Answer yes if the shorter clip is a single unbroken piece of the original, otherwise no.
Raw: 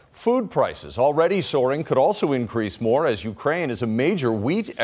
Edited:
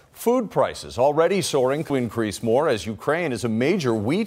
no